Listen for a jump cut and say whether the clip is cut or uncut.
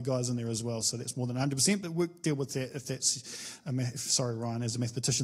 uncut